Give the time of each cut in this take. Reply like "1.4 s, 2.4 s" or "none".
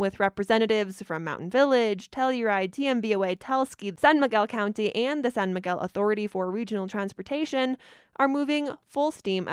none